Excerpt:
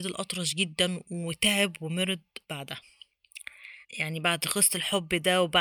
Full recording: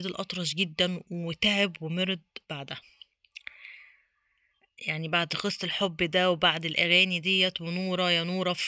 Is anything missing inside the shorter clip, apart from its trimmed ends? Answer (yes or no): yes